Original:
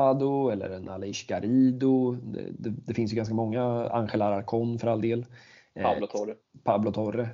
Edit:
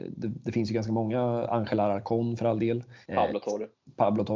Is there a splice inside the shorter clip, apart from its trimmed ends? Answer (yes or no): yes